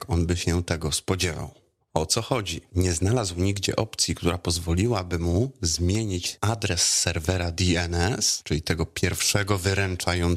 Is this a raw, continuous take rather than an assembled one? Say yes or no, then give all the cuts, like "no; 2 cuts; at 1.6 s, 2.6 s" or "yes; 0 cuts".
yes; 0 cuts